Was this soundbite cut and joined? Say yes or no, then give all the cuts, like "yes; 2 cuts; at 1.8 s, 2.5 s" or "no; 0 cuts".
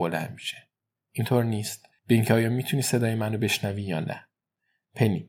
yes; 1 cut; at 1.0 s